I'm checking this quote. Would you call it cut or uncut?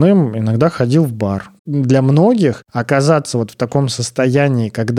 cut